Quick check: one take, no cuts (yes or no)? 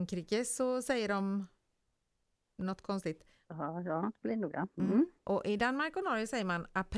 no